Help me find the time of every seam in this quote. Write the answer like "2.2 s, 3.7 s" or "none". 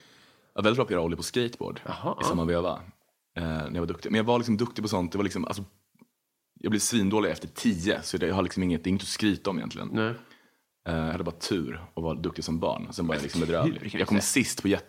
none